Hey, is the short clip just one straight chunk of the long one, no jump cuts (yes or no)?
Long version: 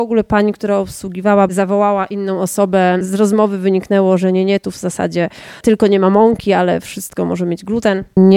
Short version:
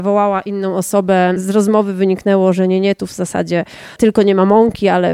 yes